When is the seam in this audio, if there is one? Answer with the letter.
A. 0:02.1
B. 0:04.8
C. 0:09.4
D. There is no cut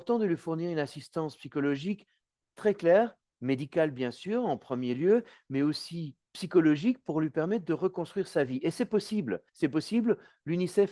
D